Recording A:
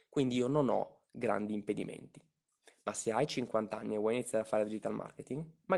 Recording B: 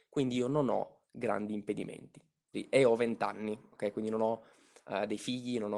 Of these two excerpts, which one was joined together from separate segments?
B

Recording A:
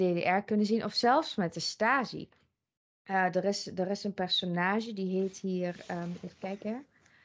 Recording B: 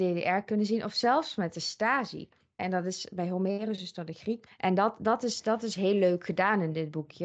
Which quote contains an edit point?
B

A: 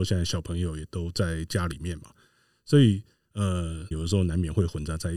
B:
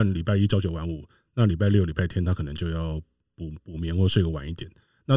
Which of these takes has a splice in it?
A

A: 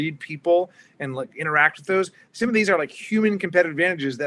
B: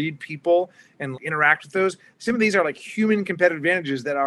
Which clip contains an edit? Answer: B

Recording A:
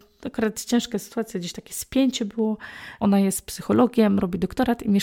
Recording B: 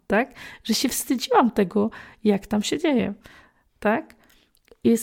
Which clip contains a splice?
A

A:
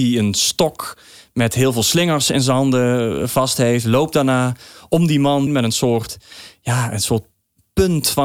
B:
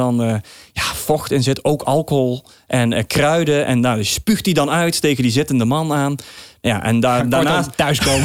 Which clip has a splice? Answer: A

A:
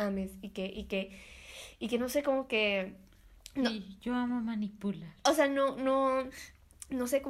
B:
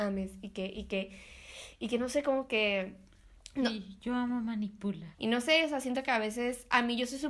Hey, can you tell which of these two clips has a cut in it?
B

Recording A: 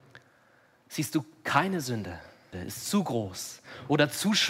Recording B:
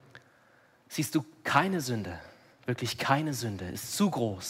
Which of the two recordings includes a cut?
A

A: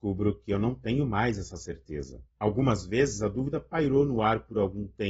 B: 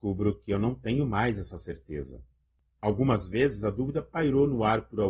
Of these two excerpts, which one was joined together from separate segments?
A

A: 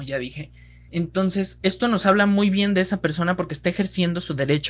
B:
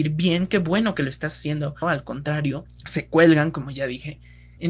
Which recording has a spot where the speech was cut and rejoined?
B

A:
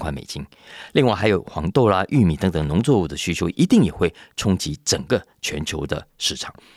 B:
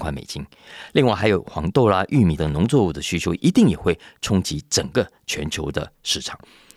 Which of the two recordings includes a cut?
B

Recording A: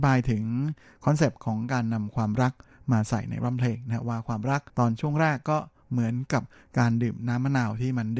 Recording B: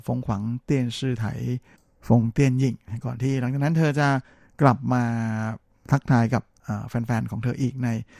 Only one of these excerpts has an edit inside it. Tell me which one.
A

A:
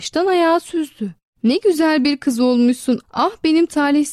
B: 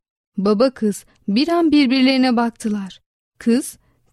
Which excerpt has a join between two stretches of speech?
A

